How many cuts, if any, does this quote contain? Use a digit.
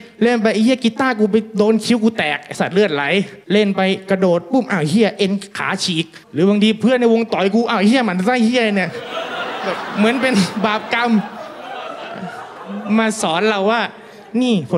2